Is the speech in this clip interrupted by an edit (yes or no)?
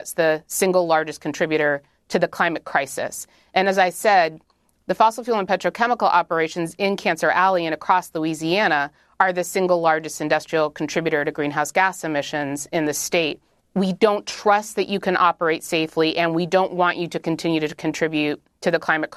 yes